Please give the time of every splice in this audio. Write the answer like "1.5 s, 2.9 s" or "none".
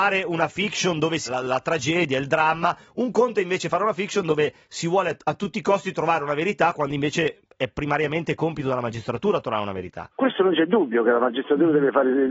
1.3 s, 10.1 s